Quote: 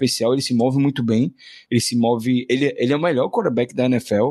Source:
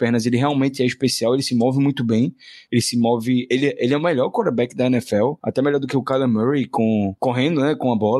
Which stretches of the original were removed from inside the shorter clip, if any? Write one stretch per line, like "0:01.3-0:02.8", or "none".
none